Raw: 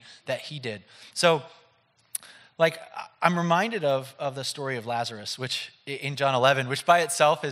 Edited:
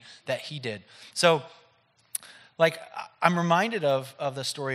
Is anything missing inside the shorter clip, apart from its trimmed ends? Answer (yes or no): no